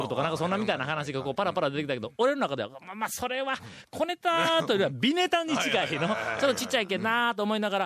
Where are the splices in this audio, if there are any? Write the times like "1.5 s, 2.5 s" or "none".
none

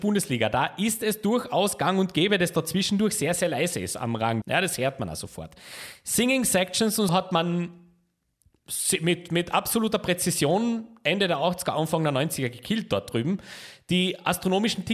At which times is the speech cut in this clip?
4.4 s, 7.1 s

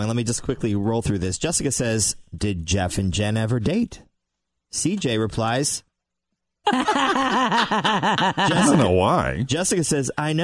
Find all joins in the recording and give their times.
6.6 s

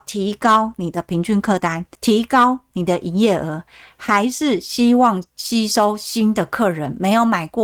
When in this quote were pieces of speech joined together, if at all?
2.0 s

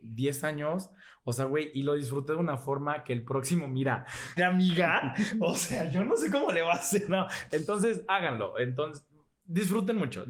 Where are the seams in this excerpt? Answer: 4.4 s

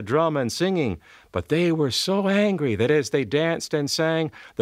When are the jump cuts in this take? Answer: none

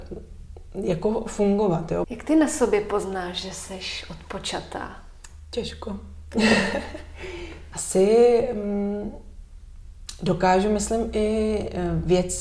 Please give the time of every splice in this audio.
2.0 s

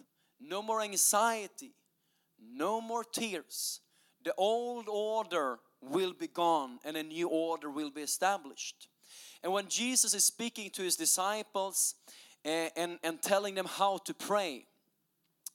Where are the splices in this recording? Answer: none

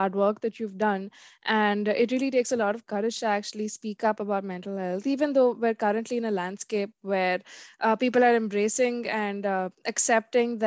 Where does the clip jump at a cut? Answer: none

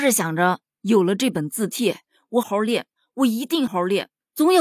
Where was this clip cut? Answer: 2.4 s, 3.7 s

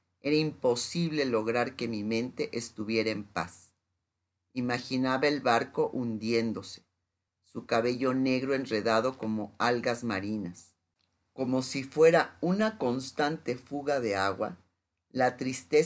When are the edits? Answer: 7.3 s

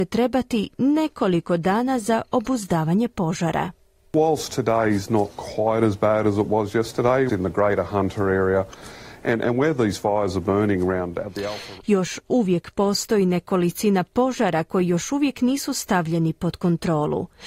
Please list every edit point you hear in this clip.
7.3 s, 11.8 s

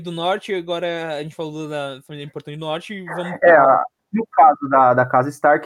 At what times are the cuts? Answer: 4.0 s

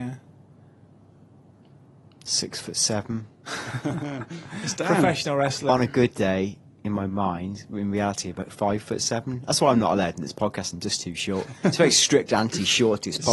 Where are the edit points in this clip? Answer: none

